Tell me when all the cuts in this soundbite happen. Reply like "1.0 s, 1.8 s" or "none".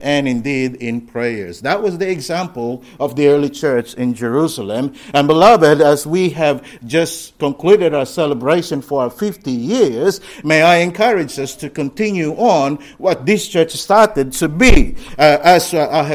none

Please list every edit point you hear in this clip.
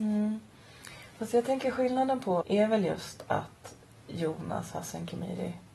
2.4 s

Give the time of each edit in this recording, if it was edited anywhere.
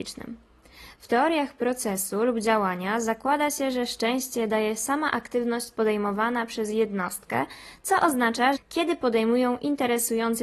0.9 s, 8.6 s

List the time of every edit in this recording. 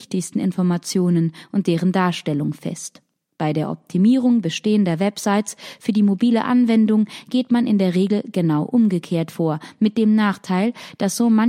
none

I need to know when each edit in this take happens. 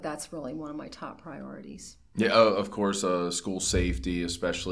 none

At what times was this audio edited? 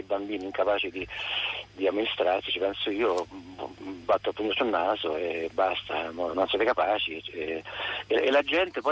6.3 s

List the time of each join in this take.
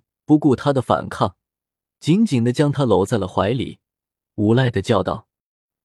none

